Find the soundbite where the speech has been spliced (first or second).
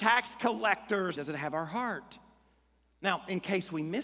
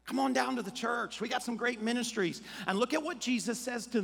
first